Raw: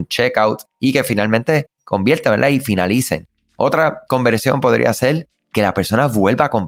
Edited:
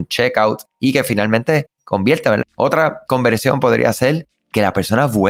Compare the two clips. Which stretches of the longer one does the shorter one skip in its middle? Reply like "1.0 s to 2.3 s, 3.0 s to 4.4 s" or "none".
2.4 s to 3.4 s